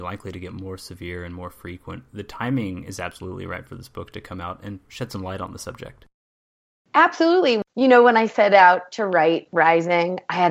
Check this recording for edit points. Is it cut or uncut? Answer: uncut